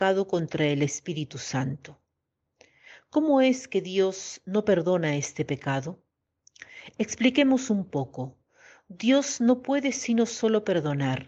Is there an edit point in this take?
no; 0 cuts

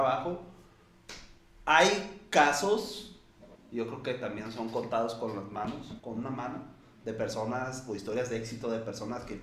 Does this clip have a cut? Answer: yes; 2 cuts; at 3.6 s, 6.0 s

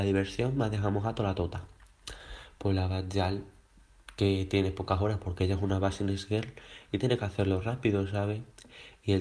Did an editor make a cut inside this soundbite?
no; 0 cuts

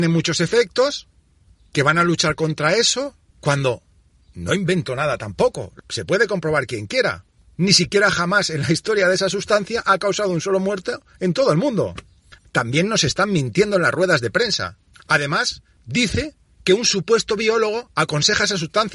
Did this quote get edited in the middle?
yes; 1 cut; at 12.4 s

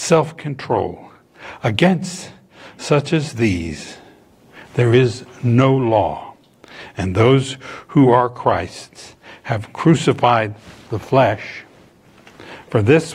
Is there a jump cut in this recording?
no; 0 cuts

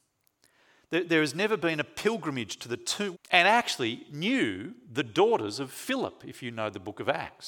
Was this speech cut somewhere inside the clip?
yes; 1 cut; at 3.1 s

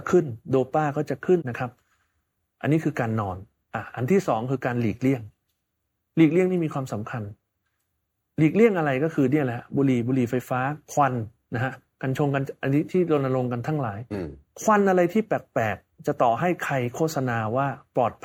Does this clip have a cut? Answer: yes; 1 cut; at 1.4 s

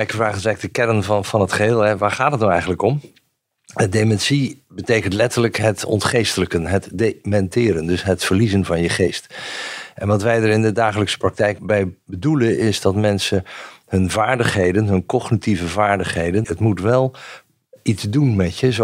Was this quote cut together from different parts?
yes; 1 cut; at 16.4 s

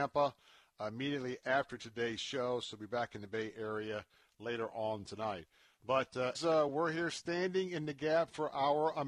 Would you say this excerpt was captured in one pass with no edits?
no; 1 cut; at 6.3 s

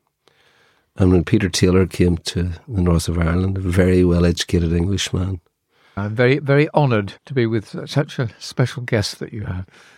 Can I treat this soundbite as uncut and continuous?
no; 2 cuts; at 6.0 s, 7.2 s

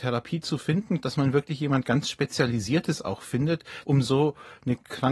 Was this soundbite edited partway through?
yes; 2 cuts; at 1.0 s, 3.8 s

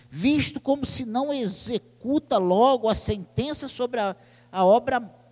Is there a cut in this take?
no; 0 cuts

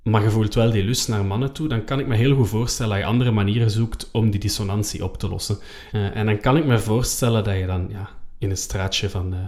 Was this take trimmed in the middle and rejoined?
yes; 1 cut; at 5.9 s

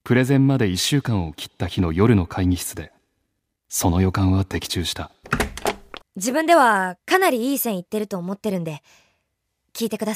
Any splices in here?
yes; 1 cut; at 6.0 s

